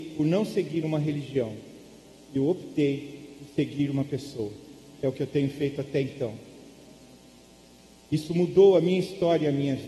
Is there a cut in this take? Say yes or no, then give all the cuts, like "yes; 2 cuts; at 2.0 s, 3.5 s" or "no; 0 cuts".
no; 0 cuts